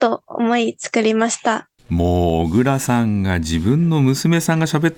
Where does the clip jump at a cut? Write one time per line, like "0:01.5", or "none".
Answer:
0:01.8